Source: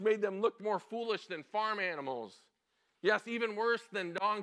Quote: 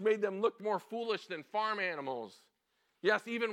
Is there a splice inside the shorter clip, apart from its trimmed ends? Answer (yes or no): no